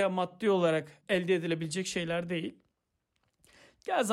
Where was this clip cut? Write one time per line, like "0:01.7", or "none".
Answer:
0:01.0